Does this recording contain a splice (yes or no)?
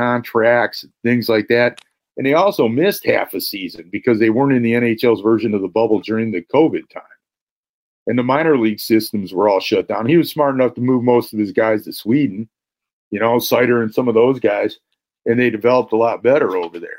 no